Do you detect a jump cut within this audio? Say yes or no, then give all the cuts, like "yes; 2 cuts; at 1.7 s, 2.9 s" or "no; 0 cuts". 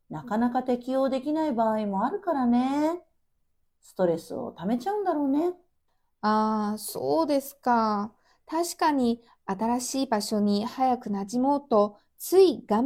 no; 0 cuts